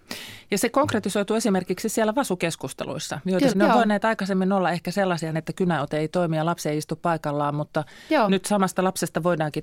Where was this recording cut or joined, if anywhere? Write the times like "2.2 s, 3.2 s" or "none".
3.5 s, 5.3 s